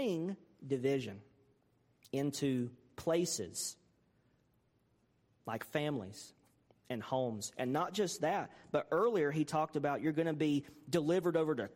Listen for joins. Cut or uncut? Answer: uncut